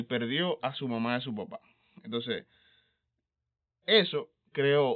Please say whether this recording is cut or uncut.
uncut